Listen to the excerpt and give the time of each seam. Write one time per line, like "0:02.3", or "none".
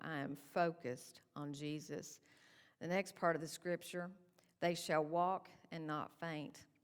none